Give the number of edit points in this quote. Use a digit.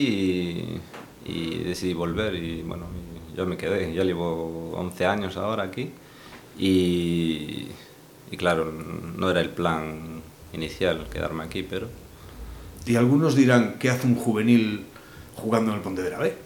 0